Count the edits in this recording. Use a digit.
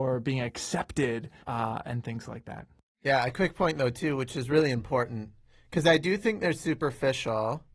1